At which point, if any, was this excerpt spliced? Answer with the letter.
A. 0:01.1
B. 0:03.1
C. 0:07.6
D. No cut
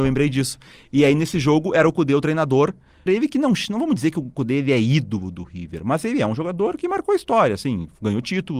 B